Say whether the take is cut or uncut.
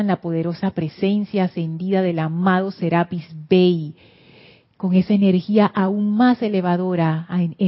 uncut